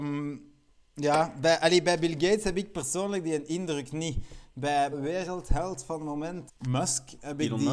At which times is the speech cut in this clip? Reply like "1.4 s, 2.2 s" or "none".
4.9 s, 6.5 s